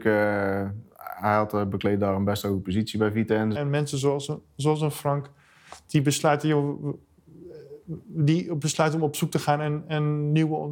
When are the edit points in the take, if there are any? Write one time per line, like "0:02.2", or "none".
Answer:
0:03.5
0:05.8